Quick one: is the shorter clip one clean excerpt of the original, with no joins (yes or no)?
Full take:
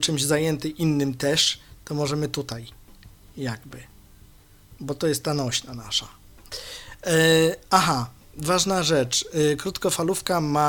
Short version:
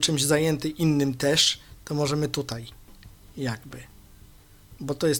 yes